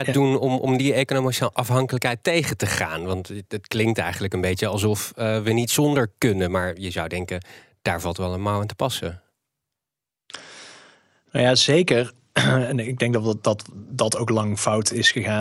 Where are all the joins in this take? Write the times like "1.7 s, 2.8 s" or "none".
none